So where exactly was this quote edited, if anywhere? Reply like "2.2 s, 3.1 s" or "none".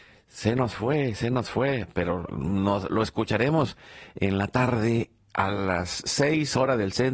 none

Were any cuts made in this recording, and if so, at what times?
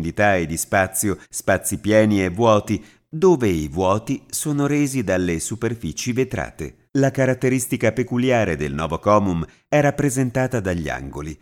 1.2 s, 6.9 s

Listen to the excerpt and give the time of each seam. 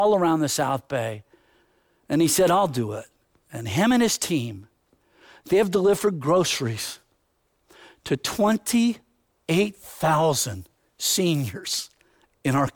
none

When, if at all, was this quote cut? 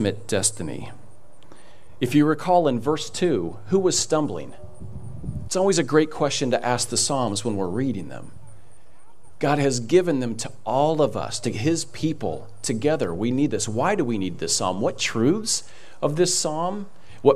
5.5 s

